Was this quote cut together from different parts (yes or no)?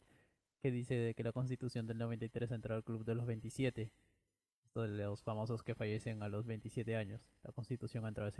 no